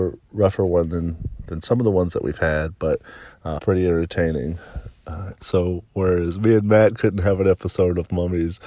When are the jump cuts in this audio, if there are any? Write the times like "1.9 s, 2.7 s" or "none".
3.6 s, 5.3 s